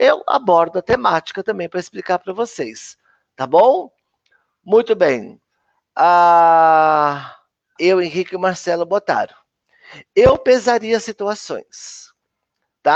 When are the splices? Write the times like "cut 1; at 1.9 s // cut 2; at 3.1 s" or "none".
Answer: cut 1; at 7.8 s